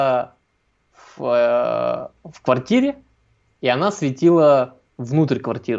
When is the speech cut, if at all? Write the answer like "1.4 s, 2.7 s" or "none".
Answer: none